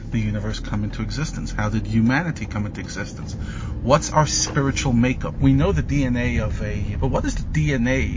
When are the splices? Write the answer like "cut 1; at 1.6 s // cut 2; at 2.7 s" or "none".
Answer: cut 1; at 5.4 s // cut 2; at 6.9 s